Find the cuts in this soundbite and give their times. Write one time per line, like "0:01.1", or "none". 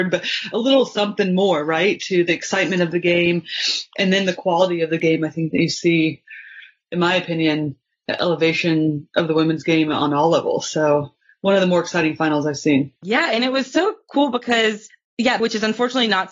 0:13.0
0:15.4